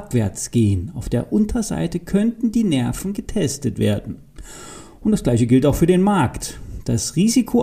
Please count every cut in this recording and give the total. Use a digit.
0